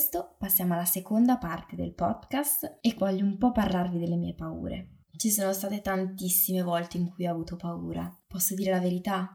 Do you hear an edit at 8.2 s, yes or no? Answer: yes